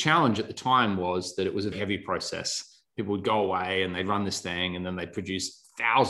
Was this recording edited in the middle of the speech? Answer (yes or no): yes